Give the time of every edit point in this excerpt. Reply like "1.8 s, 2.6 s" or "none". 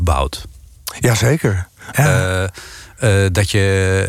1.9 s